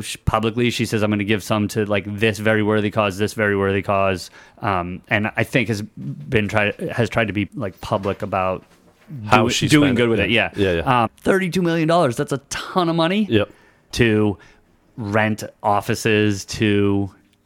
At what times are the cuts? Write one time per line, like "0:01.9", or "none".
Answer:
0:07.5
0:11.1
0:13.9